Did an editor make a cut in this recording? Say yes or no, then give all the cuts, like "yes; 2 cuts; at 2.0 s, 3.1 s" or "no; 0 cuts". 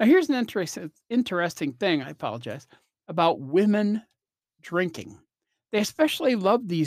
no; 0 cuts